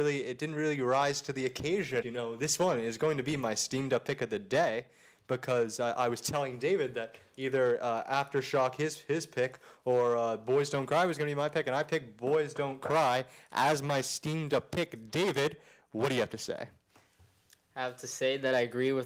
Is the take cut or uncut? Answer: cut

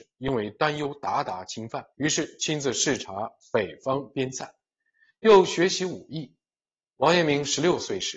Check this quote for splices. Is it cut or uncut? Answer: cut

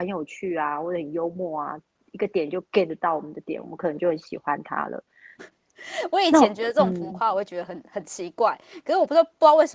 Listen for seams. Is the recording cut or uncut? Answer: cut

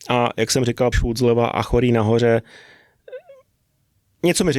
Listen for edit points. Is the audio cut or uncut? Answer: cut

